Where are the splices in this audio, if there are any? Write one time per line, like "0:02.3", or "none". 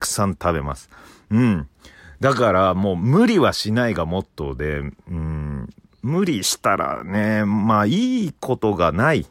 none